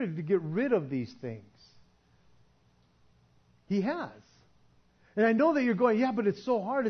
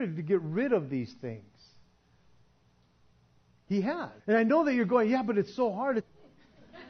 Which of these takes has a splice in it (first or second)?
second